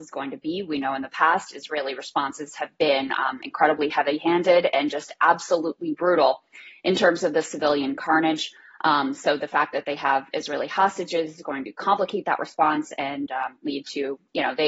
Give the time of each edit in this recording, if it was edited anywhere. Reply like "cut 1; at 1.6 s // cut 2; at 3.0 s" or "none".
none